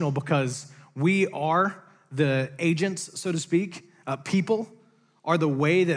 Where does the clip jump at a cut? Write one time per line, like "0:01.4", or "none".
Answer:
none

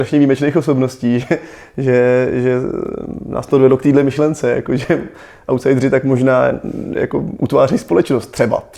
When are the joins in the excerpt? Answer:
none

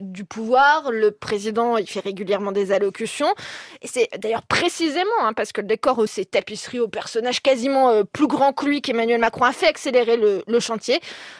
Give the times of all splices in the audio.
0:06.1

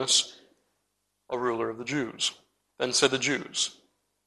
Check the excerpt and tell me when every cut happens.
0:02.7

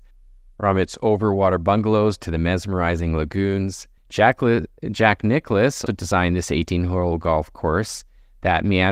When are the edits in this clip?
0:04.0
0:05.9

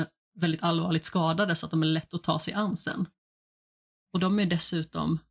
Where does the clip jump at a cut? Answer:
0:04.0

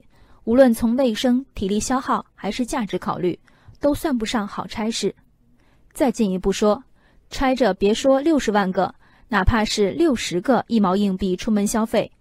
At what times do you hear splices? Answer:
none

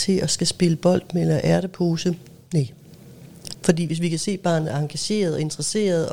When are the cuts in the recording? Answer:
0:03.5

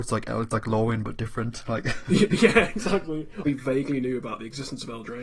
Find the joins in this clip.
0:03.4

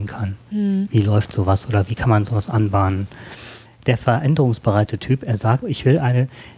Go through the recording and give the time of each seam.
0:03.6
0:05.6

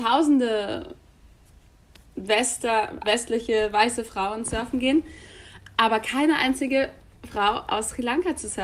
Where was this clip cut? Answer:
0:03.0

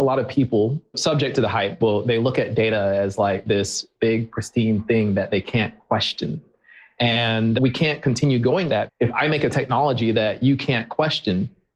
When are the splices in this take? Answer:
0:08.7

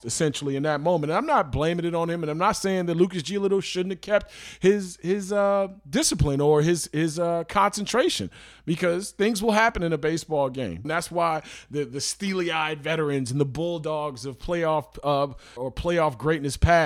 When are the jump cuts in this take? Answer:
0:10.8
0:15.6

